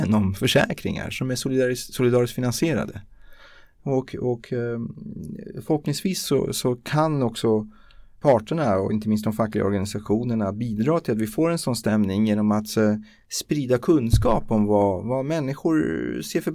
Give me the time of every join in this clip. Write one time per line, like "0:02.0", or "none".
none